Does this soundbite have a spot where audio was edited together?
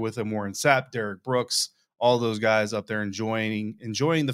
no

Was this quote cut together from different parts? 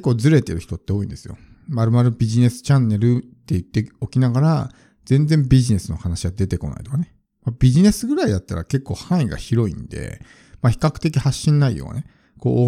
no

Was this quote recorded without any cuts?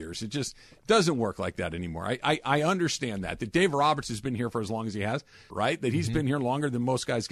no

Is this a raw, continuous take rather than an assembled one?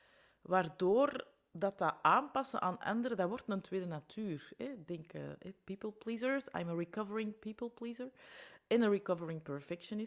yes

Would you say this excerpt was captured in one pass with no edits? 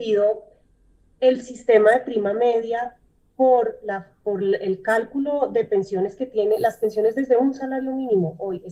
yes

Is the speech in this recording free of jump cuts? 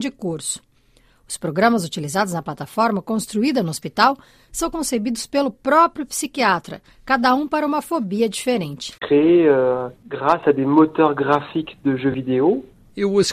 no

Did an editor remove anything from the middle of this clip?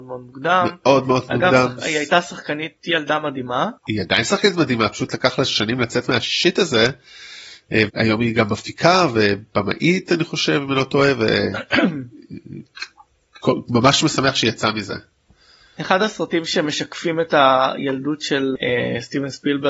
yes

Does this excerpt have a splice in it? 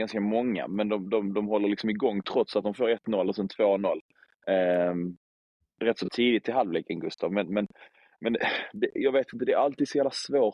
no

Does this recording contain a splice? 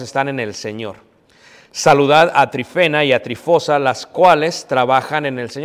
no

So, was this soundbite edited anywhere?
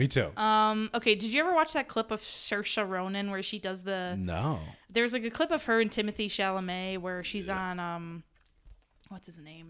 no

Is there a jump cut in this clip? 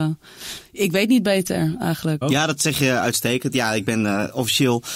yes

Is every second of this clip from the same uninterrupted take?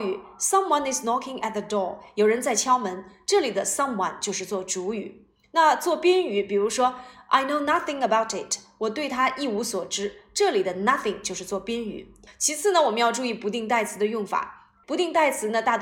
no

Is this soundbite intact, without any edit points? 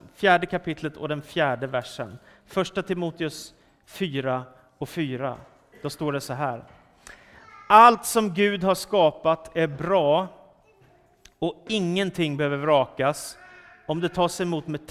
yes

